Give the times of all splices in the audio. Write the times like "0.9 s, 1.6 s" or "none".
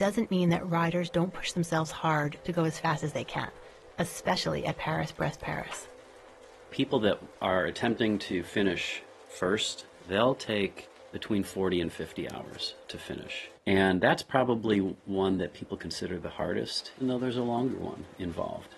13.5 s, 17.0 s